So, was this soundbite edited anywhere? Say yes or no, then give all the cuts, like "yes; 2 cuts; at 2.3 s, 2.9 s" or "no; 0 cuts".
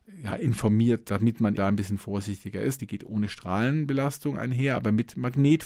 yes; 2 cuts; at 1.6 s, 2.8 s